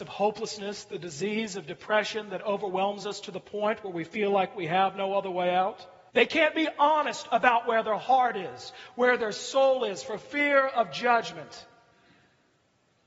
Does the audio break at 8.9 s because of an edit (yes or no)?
no